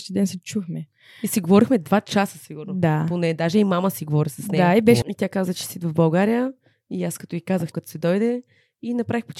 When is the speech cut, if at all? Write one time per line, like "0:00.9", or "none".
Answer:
0:05.0
0:07.7